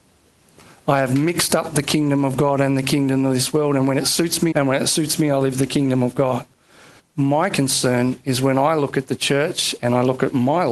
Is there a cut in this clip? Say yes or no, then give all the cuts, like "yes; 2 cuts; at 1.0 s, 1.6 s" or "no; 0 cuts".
yes; 2 cuts; at 4.5 s, 7.0 s